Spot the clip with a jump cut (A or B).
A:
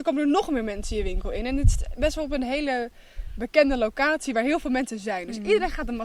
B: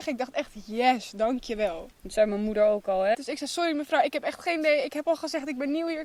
B